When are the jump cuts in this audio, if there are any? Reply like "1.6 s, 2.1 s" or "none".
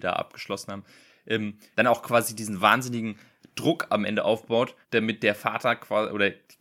1.7 s, 4.8 s